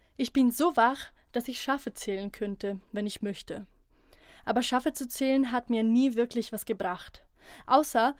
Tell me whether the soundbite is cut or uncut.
uncut